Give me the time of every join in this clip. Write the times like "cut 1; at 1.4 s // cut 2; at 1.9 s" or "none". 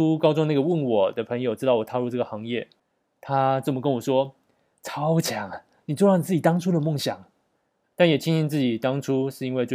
cut 1; at 7.8 s